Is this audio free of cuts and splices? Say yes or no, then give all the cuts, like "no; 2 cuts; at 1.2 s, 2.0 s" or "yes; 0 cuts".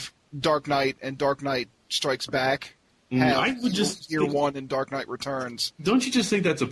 yes; 0 cuts